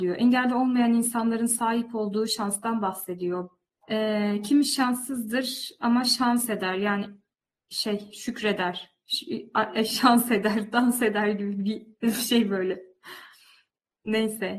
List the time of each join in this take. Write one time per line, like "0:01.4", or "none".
0:03.8